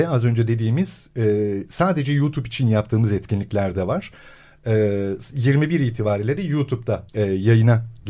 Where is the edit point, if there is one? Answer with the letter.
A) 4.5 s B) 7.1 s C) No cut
B